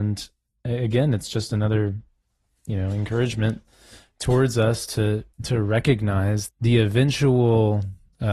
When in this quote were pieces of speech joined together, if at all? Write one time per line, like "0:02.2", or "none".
0:05.3
0:06.5